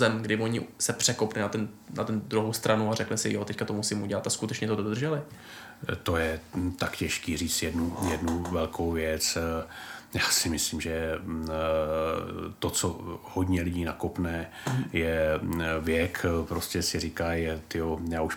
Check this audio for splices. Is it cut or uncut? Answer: uncut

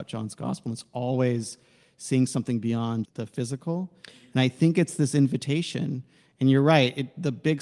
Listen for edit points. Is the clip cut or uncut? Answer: cut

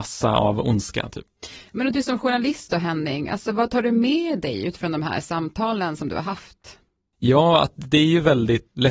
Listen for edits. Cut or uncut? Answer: uncut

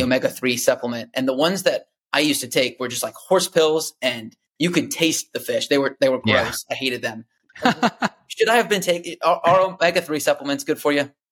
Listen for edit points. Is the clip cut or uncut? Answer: uncut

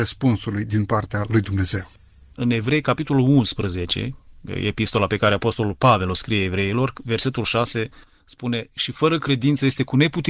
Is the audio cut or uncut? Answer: cut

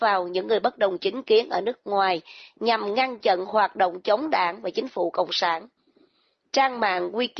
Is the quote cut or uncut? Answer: uncut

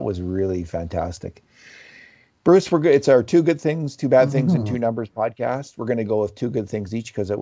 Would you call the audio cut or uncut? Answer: uncut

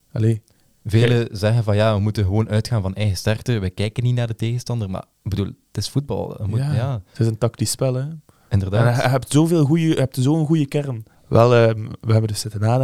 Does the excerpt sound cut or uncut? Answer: cut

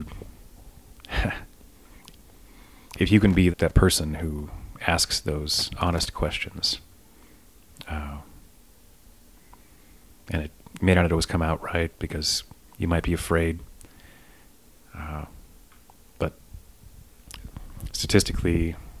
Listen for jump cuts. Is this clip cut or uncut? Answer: cut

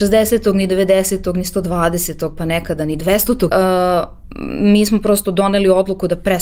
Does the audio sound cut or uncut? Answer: cut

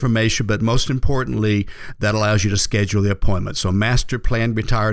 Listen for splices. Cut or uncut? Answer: uncut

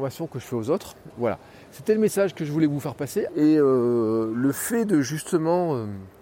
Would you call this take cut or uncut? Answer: cut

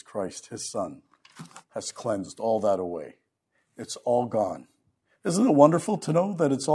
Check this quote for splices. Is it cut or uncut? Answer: uncut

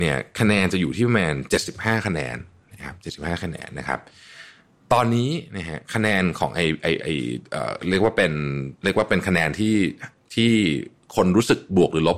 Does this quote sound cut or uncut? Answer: cut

